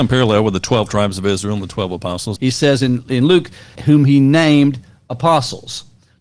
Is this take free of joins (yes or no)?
no